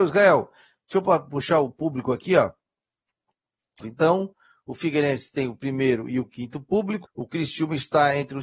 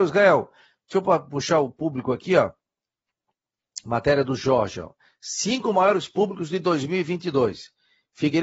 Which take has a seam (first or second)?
first